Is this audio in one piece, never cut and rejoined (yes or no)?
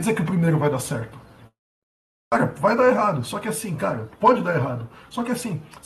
yes